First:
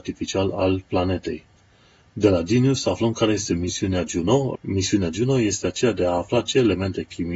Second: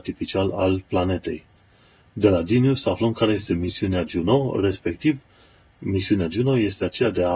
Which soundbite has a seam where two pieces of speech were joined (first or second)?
first